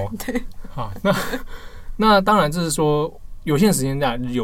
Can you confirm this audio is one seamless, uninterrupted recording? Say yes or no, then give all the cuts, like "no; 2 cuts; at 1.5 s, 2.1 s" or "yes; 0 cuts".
yes; 0 cuts